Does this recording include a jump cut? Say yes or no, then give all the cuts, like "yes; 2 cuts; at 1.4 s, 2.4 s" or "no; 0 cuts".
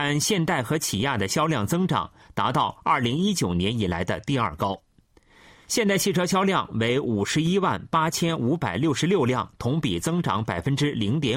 no; 0 cuts